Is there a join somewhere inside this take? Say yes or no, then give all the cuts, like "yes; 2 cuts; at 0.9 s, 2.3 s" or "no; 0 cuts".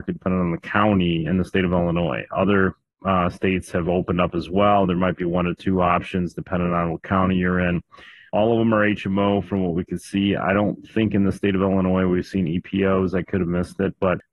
no; 0 cuts